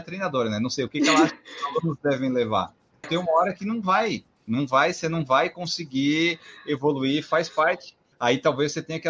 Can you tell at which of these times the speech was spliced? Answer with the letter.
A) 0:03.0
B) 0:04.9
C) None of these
A